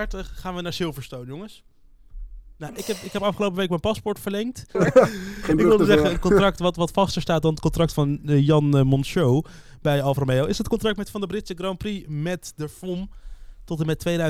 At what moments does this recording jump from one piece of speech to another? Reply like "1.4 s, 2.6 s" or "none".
4.7 s